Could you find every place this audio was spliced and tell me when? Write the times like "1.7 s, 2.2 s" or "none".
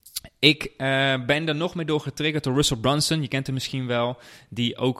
none